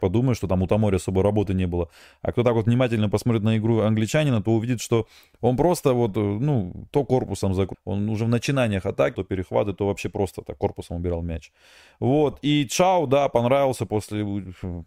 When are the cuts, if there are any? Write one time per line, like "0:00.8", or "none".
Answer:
0:07.7
0:09.1